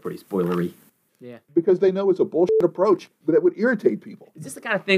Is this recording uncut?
no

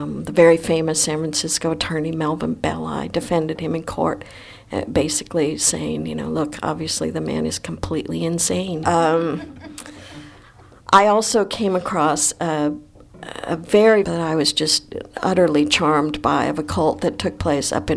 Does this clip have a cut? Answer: yes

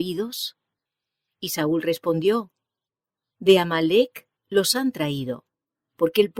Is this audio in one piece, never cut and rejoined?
yes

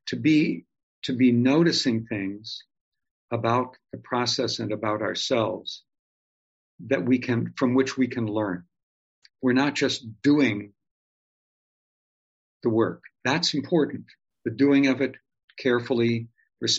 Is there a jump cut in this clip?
no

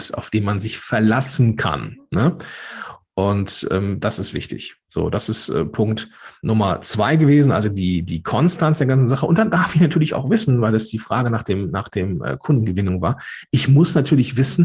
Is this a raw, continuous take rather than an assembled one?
yes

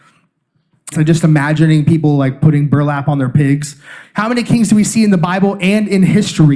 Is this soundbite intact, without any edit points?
no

